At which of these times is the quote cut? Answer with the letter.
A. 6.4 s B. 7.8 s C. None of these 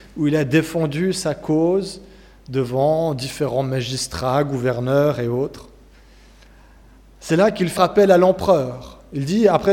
B